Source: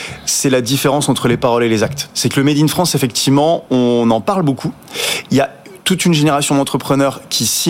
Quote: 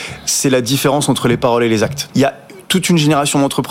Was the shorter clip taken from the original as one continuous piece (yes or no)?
no